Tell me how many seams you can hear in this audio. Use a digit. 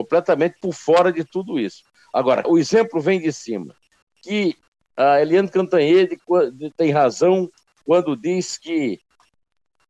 2